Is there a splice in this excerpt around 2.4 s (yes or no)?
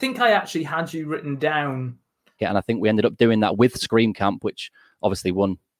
yes